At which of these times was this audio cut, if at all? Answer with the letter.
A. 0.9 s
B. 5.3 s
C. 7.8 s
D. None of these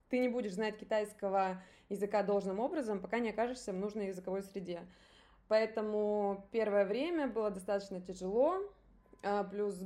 D